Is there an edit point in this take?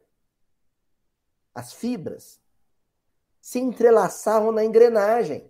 no; 0 cuts

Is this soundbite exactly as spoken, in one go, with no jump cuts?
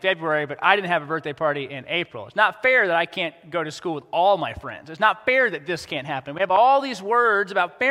yes; 0 cuts

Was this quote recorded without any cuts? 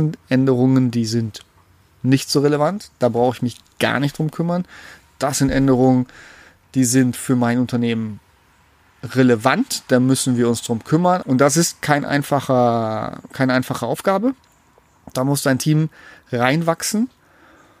no; 1 cut; at 11.2 s

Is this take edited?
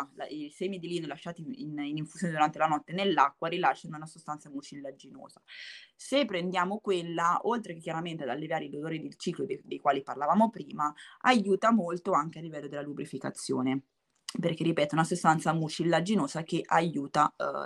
no; 0 cuts

